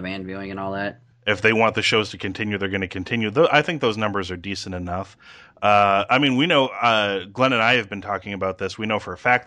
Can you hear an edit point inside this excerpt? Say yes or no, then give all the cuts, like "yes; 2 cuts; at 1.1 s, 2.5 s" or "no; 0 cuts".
yes; 1 cut; at 1.1 s